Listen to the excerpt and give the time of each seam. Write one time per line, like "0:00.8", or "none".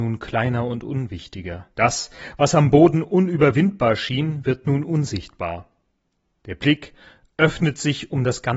0:01.7